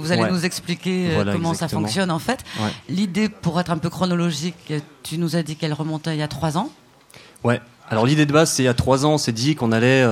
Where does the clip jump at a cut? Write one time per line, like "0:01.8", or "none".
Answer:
none